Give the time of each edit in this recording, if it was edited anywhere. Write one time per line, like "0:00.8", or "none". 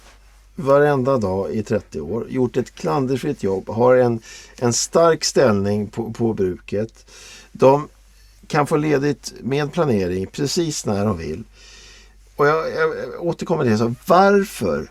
none